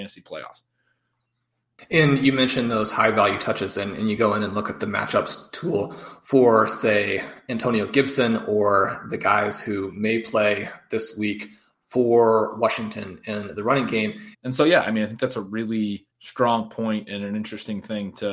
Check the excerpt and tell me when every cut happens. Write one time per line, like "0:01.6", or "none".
0:14.3
0:16.1